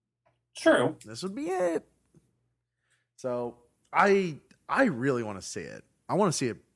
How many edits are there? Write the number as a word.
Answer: zero